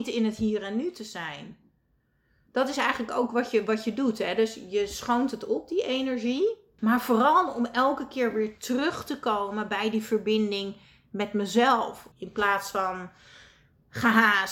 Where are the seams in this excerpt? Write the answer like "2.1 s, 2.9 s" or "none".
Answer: 6.8 s, 12.1 s

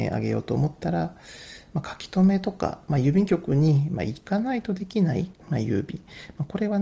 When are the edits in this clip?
5.4 s

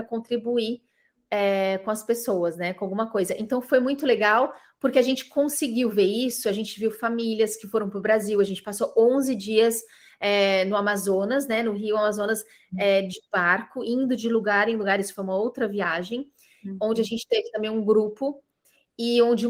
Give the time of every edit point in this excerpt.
none

